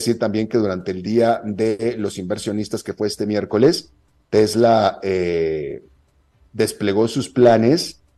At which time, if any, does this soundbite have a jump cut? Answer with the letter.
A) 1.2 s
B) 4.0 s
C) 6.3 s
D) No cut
D